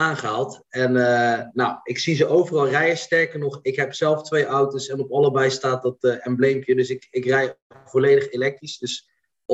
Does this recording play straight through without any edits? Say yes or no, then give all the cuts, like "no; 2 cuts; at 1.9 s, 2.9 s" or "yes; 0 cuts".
yes; 0 cuts